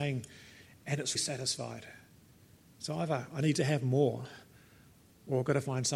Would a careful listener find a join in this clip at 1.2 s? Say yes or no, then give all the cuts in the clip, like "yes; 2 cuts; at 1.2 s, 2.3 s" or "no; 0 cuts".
yes; 1 cut; at 1.2 s